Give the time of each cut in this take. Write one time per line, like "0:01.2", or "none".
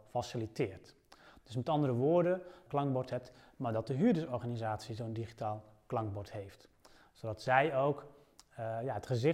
0:02.7

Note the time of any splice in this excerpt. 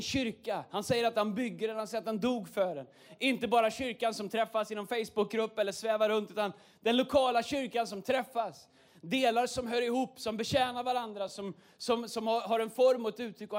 none

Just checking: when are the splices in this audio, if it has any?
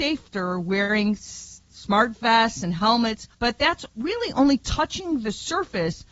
0:03.3

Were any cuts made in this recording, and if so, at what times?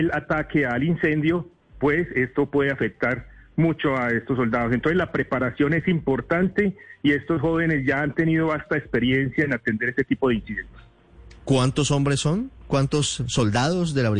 none

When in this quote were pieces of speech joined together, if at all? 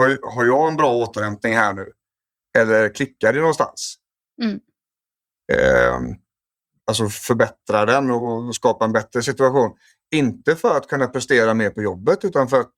0:06.8

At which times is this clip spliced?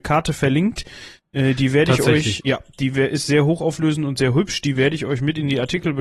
0:02.4

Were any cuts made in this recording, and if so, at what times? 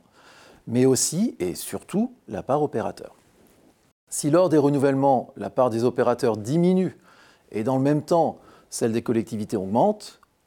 none

